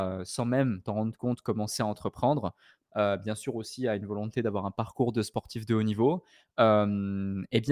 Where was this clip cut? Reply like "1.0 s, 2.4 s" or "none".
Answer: 2.8 s